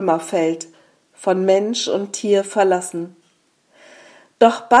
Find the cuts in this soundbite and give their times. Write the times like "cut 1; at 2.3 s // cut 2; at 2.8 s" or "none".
none

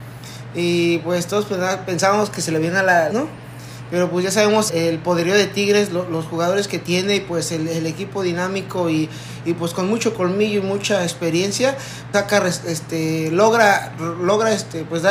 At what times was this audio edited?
cut 1; at 3.1 s // cut 2; at 4.7 s // cut 3; at 12.1 s

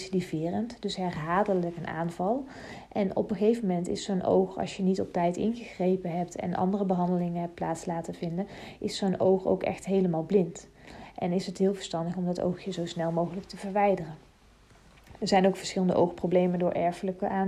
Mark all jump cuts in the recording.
cut 1; at 11.1 s

